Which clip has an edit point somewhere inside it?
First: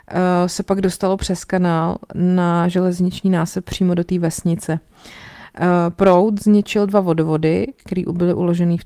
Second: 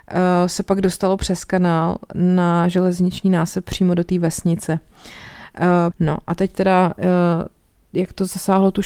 second; 1 cut; at 5.9 s

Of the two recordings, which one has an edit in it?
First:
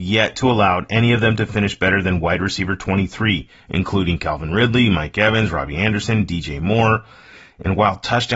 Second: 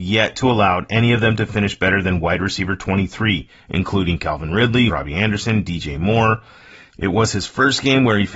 second; 2 cuts; at 4.9 s, 6.9 s

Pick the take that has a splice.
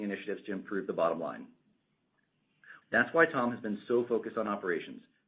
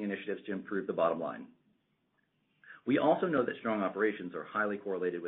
first; 1 cut; at 2.8 s

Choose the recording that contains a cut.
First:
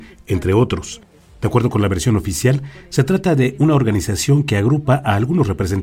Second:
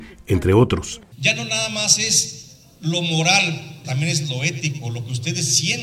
second; 2 cuts; at 1.1 s, 3.8 s

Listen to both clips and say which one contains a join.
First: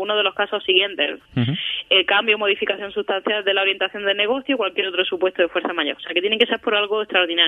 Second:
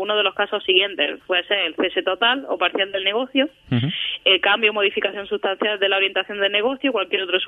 first; 1 cut; at 1.3 s

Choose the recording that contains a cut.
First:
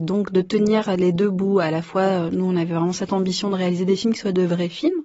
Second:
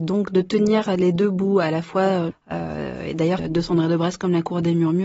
second; 2 cuts; at 2.3 s, 3.4 s

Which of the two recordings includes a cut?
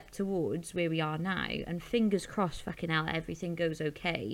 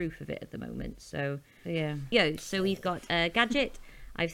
second; 1 cut; at 1.6 s

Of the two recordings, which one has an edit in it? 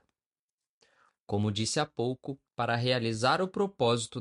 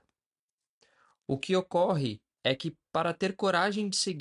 first; 2 cuts; at 1.1 s, 2.5 s

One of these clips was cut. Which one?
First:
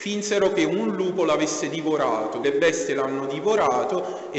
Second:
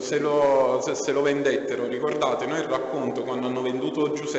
first; 1 cut; at 2.4 s

